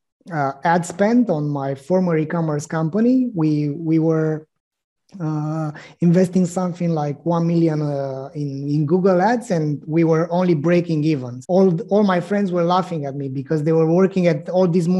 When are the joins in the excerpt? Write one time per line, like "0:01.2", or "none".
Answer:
0:11.4

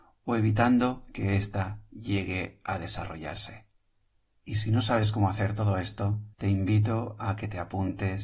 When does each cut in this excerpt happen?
0:04.4
0:06.3

